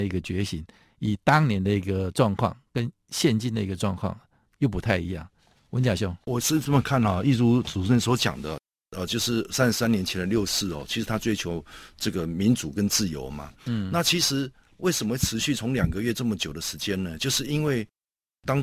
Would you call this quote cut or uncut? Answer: cut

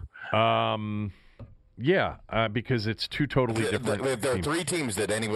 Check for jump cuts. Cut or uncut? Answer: uncut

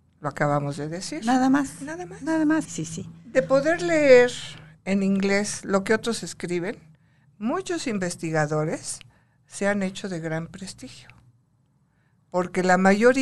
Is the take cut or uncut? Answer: cut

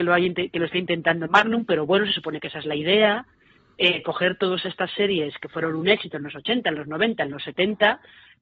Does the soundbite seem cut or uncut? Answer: uncut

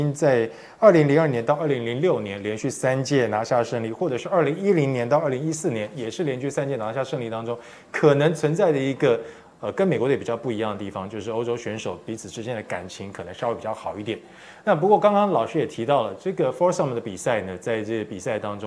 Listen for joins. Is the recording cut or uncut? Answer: uncut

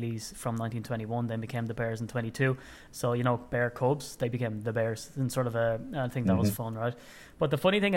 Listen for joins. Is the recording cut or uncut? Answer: cut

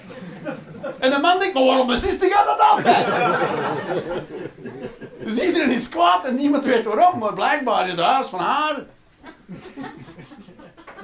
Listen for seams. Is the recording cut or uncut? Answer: uncut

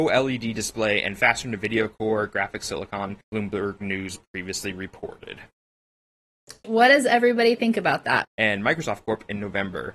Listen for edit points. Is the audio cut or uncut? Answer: cut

